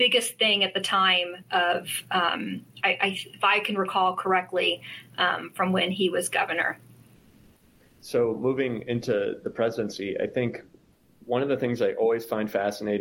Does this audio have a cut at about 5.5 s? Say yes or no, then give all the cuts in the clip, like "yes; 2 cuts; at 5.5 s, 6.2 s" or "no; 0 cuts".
no; 0 cuts